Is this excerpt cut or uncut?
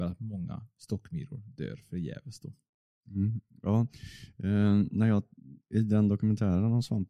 uncut